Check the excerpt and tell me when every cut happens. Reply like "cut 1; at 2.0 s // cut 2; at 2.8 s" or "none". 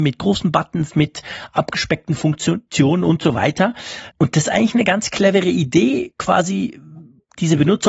cut 1; at 4.1 s